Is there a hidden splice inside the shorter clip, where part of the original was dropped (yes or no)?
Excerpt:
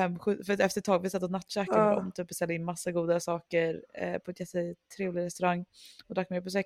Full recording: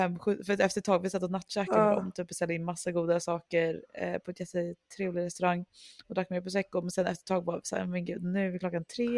no